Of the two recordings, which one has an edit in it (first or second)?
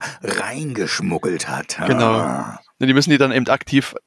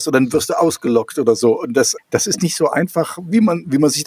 second